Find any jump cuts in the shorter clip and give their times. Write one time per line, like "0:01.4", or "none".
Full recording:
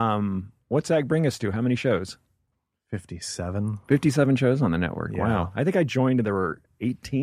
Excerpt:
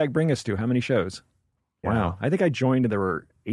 0:01.8